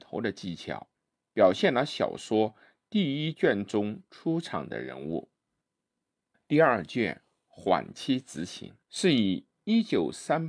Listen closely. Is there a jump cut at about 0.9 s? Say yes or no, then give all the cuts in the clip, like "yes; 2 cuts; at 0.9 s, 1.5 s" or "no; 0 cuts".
no; 2 cuts; at 6.3 s, 8.8 s